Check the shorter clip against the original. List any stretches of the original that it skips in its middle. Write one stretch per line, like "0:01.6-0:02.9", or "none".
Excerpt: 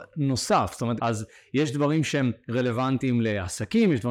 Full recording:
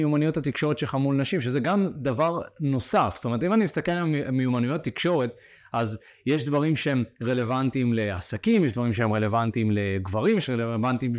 0:03.4-0:05.7

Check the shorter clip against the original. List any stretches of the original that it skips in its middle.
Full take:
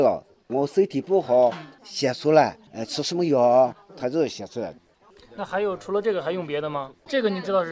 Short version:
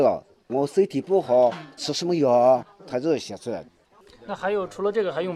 0:01.8-0:02.9

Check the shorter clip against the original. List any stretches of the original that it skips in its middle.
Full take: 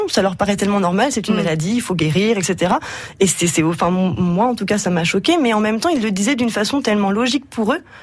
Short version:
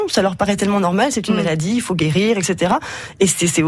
none

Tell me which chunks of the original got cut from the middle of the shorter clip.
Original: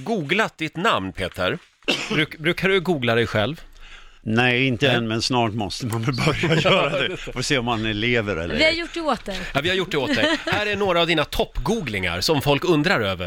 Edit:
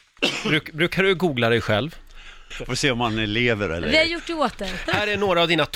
0:04.2-0:07.2
0:09.5-0:10.4

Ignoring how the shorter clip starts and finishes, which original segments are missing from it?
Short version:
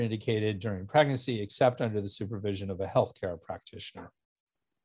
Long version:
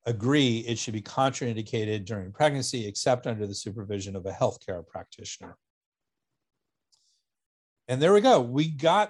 none

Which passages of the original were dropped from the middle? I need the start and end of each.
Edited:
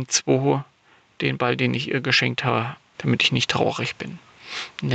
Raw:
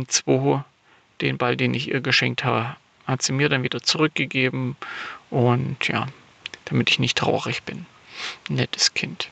0:02.9-0:06.6

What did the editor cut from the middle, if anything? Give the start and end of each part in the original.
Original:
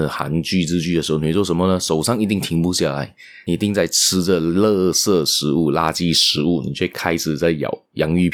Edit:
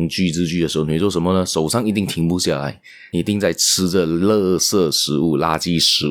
none

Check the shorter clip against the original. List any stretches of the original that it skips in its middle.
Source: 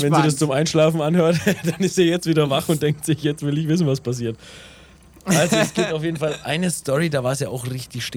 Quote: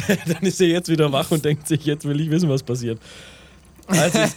none

